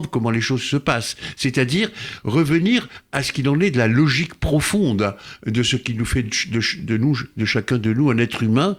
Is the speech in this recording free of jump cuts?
yes; 0 cuts

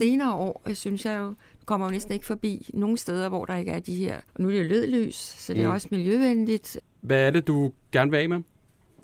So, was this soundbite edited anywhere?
yes; 2 cuts; at 4.3 s, 6.8 s

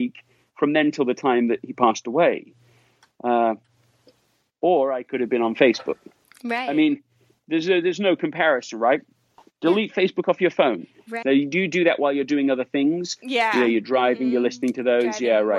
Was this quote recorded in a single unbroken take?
no; 1 cut; at 11.2 s

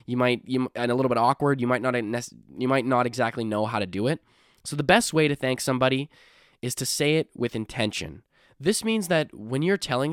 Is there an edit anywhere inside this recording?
no; 0 cuts

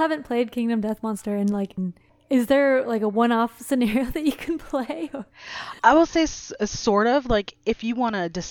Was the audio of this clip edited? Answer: yes; 1 cut; at 1.8 s

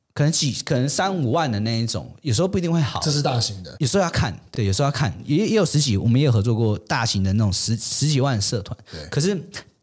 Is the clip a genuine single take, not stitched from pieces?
yes; 0 cuts

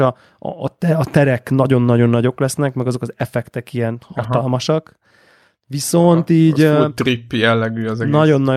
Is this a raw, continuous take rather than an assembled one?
yes; 0 cuts

